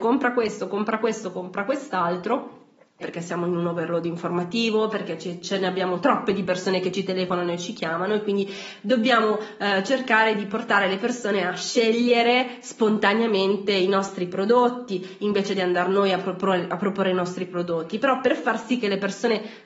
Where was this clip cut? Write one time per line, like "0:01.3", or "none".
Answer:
0:03.0

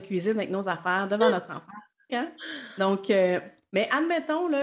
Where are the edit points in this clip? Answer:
0:02.1

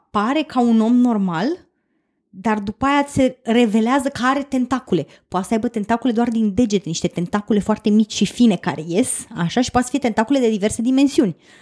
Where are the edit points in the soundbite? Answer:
none

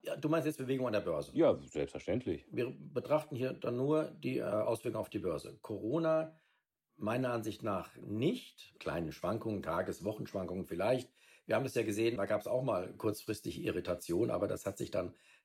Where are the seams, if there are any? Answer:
0:08.8
0:12.2

